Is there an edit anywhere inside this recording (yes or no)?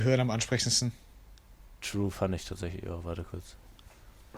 no